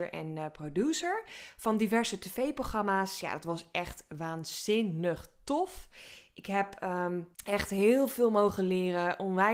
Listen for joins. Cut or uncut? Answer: cut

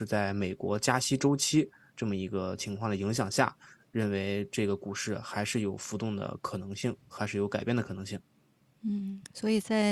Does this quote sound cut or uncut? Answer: cut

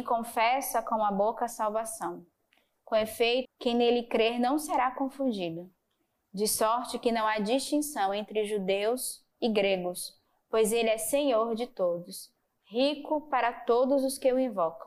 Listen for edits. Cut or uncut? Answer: cut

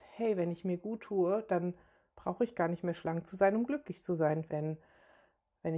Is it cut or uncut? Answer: cut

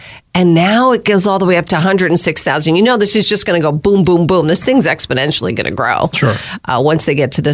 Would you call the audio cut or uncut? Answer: uncut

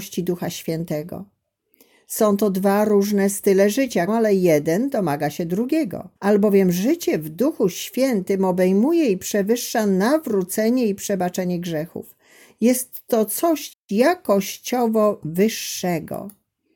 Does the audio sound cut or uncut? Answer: cut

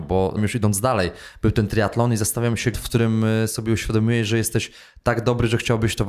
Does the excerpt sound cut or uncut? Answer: cut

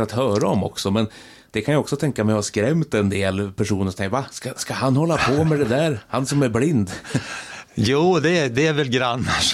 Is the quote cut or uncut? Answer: uncut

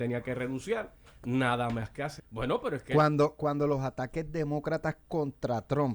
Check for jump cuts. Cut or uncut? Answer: cut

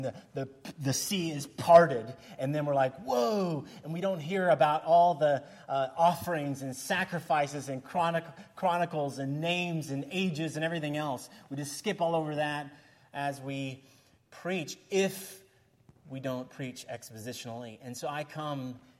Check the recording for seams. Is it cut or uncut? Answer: uncut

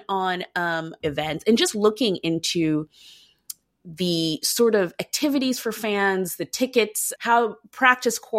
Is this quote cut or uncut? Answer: cut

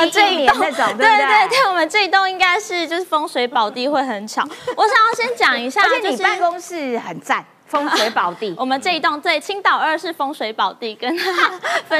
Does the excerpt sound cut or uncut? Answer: uncut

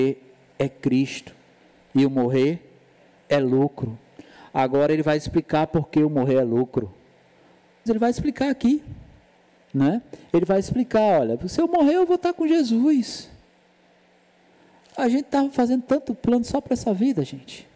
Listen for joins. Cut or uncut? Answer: cut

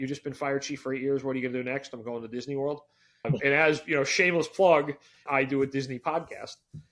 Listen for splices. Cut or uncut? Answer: cut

